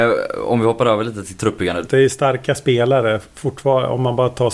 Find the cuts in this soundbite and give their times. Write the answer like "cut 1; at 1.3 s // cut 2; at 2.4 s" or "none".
cut 1; at 1.9 s